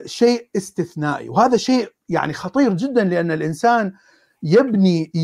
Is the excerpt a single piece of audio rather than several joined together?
yes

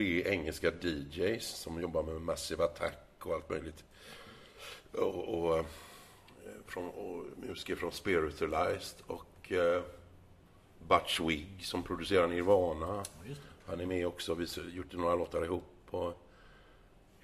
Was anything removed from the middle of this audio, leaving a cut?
no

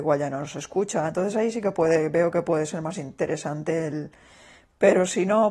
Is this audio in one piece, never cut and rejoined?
yes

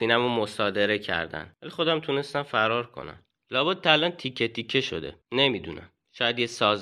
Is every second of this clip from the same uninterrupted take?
no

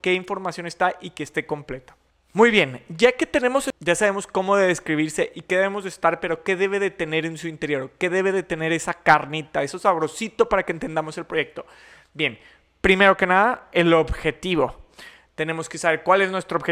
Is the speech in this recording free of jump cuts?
yes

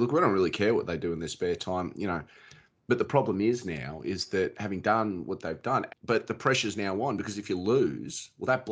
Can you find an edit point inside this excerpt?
yes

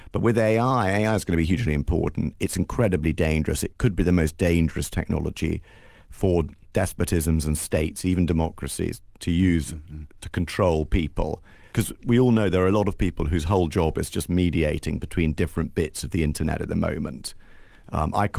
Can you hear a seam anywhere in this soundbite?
yes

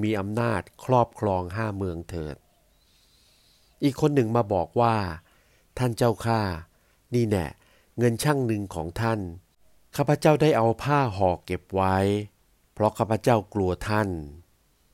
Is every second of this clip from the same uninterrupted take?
yes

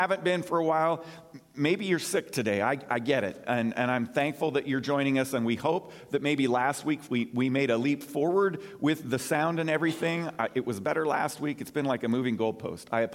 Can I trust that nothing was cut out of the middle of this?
yes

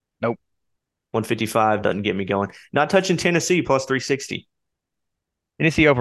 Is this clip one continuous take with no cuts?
no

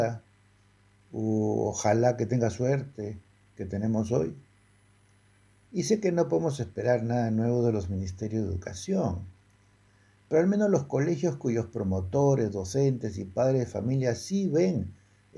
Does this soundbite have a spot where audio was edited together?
yes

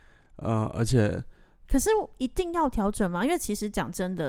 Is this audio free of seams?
no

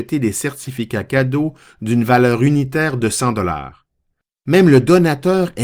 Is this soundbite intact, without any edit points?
yes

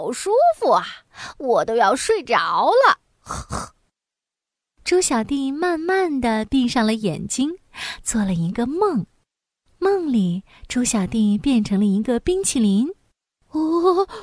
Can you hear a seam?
no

